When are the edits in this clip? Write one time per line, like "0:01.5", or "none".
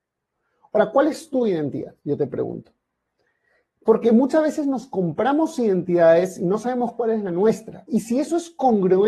0:07.9